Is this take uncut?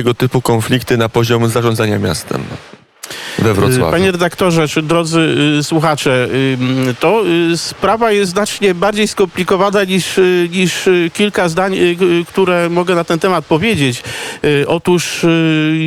yes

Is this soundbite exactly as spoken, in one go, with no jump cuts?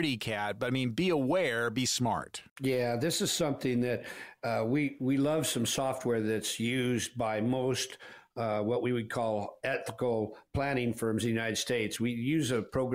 no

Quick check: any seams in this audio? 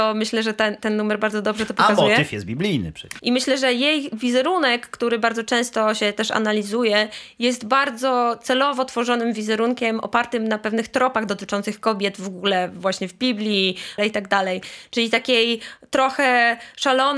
yes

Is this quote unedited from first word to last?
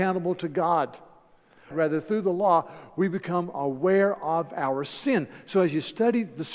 no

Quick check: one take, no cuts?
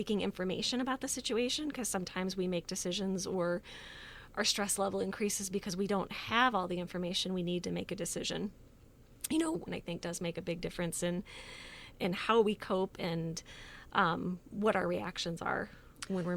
no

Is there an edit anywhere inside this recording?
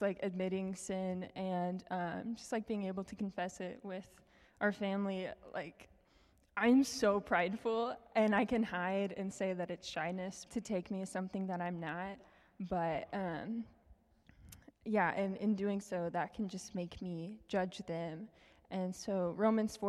yes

